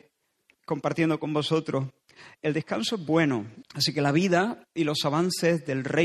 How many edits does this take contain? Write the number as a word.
one